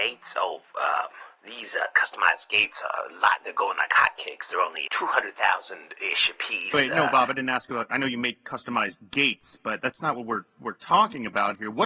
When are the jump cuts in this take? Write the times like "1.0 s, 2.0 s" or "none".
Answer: 4.9 s